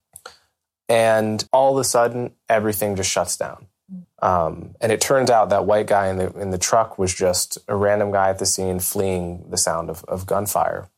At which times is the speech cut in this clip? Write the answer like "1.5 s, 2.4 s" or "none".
1.5 s, 4.0 s

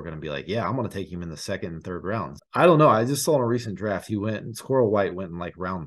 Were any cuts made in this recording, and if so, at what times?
2.4 s

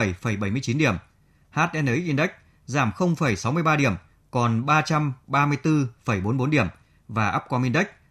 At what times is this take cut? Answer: none

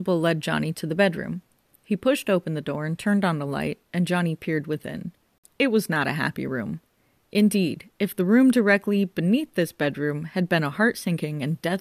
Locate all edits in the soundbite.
none

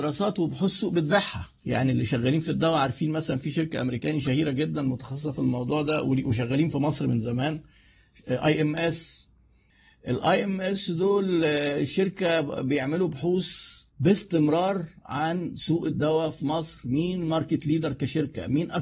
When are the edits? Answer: 1.6 s, 13.9 s

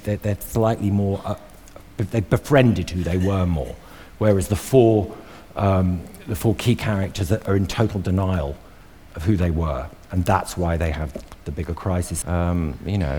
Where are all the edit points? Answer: 12.2 s

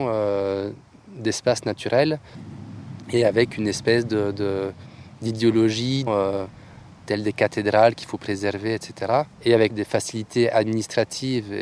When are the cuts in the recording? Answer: 6.1 s, 9.3 s

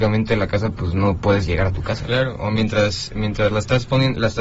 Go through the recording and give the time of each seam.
2.1 s

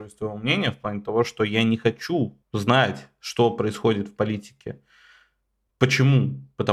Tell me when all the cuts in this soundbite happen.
2.4 s

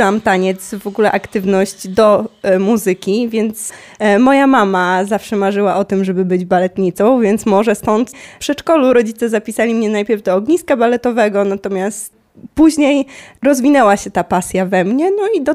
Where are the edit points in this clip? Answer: none

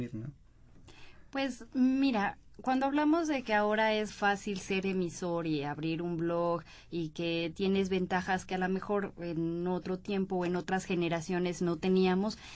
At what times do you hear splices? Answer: 4.1 s

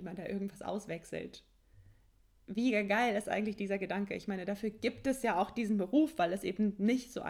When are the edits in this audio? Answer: none

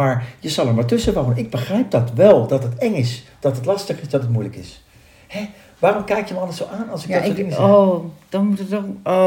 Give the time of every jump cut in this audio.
none

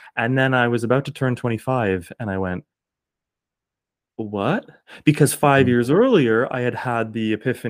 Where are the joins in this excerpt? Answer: 4.1 s

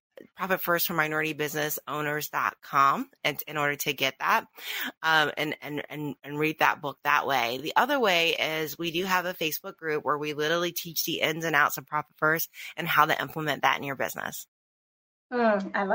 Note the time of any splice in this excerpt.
none

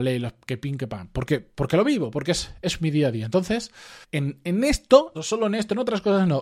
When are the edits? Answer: 4.0 s, 5.1 s

